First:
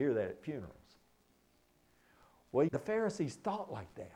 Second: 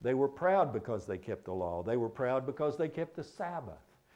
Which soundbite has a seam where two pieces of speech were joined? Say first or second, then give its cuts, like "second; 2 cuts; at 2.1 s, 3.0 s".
first; 1 cut; at 2.7 s